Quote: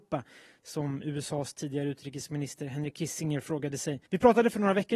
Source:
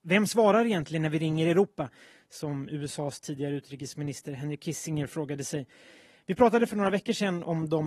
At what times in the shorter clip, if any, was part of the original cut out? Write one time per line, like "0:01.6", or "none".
0:04.1